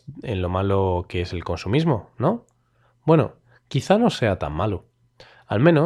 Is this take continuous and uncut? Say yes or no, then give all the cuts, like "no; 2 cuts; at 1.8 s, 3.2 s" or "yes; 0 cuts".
yes; 0 cuts